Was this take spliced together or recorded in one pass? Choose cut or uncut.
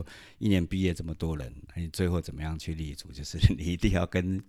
uncut